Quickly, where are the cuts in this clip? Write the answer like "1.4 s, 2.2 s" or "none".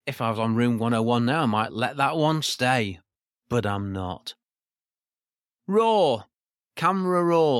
none